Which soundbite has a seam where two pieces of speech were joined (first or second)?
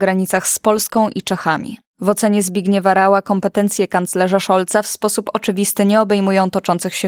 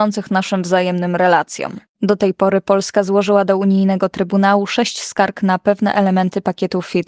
second